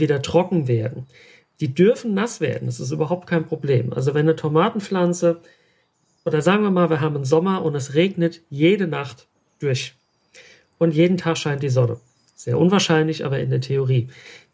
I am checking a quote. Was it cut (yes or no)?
no